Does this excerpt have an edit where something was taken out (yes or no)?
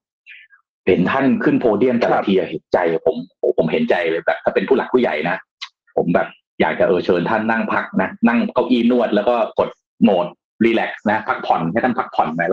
no